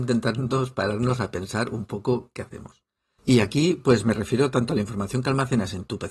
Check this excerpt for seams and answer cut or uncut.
cut